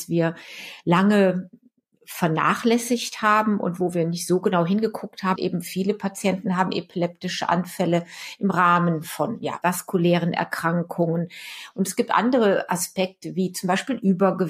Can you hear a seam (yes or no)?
yes